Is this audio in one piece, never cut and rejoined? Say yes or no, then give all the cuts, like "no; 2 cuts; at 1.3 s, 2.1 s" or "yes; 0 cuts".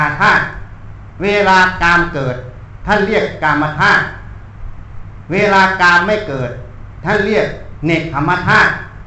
yes; 0 cuts